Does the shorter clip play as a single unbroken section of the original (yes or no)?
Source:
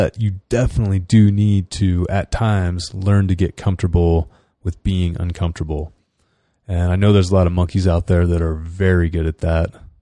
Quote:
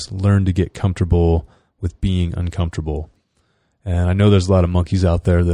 yes